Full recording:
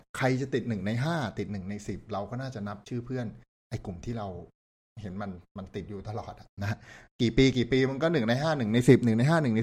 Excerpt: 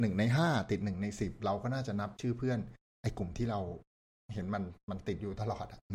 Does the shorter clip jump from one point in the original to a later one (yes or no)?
no